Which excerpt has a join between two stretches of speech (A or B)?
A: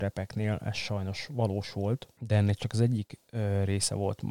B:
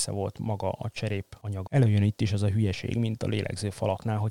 B